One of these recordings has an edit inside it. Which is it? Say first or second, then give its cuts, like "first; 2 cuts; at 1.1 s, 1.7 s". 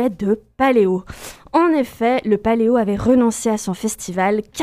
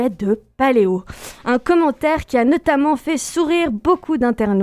first; 1 cut; at 1.4 s